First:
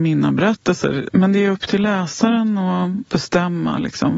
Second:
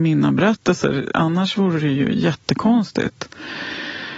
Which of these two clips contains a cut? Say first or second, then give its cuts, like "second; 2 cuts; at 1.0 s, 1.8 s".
first; 1 cut; at 1.1 s